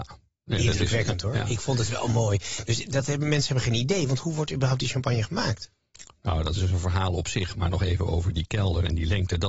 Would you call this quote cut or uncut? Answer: uncut